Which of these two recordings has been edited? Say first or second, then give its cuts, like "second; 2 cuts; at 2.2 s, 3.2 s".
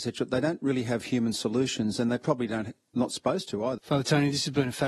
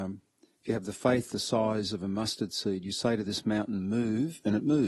first; 1 cut; at 3.8 s